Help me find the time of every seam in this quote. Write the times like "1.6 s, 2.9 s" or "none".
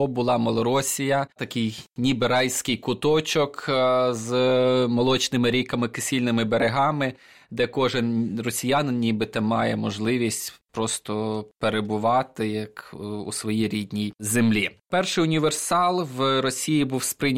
1.3 s